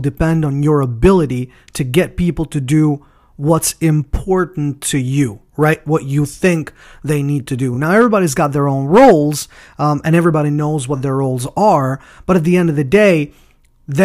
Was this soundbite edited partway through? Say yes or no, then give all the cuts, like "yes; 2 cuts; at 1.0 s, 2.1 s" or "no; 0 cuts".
no; 0 cuts